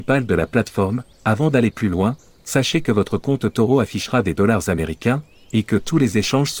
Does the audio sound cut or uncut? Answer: uncut